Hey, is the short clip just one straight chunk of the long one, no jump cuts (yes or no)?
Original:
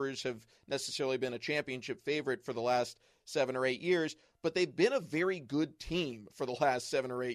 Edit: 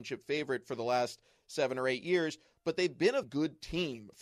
no